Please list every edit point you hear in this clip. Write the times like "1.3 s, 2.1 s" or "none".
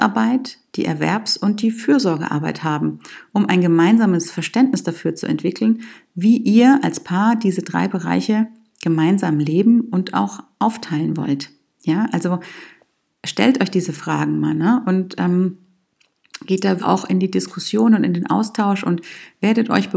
16.8 s